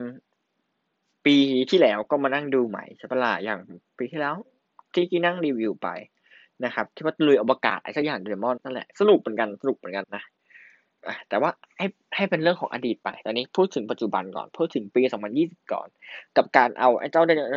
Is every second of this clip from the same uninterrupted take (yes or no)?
no